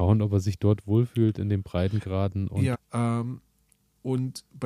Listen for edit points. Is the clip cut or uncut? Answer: cut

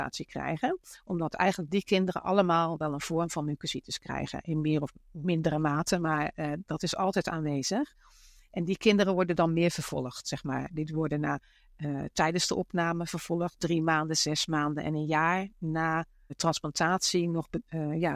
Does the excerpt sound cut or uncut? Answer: cut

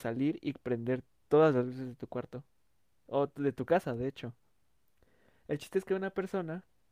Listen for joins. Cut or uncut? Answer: uncut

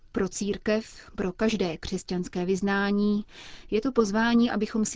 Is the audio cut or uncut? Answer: uncut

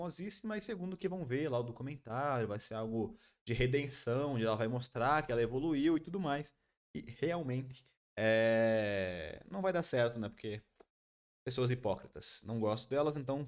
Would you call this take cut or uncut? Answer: uncut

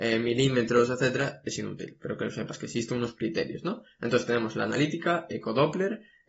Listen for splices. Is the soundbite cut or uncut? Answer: uncut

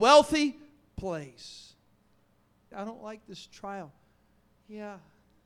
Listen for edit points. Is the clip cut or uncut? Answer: cut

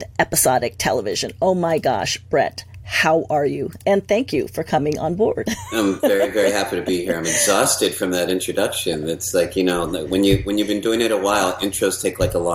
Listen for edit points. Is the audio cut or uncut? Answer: uncut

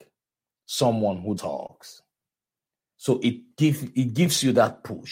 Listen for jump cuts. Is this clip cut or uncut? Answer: cut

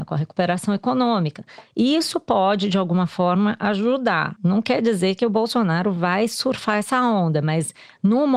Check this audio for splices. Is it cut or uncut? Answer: uncut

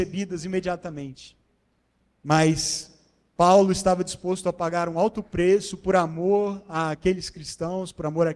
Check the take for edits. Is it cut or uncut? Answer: uncut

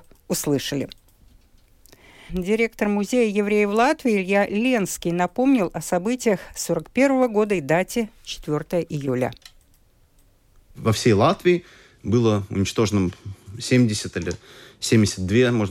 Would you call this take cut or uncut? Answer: cut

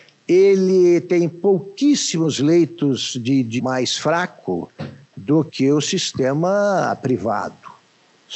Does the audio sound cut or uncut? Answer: cut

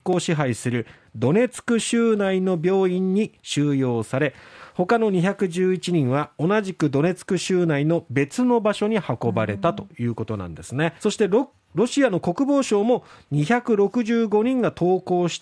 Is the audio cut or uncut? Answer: cut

